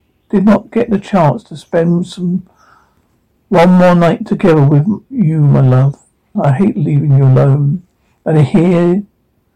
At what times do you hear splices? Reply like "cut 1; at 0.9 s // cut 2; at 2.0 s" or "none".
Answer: cut 1; at 6.3 s